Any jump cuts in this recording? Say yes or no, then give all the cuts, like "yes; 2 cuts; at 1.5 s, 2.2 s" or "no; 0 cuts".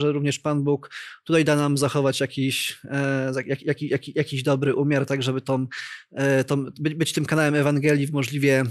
no; 0 cuts